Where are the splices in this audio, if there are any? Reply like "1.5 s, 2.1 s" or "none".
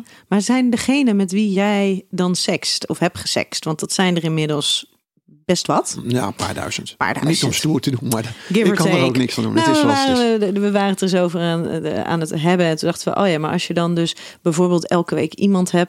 none